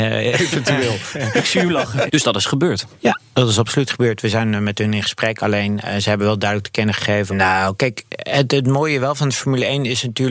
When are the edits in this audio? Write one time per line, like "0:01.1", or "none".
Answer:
0:02.1
0:07.3